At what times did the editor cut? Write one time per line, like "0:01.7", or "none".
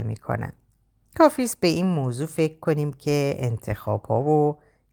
0:01.0